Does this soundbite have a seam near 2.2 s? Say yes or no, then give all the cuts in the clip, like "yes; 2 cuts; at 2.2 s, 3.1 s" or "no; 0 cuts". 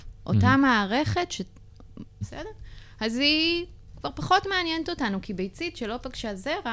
yes; 1 cut; at 2.2 s